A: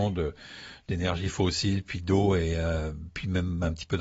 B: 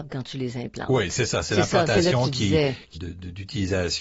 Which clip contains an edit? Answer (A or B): B